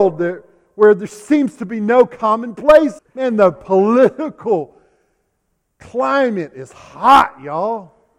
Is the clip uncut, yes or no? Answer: no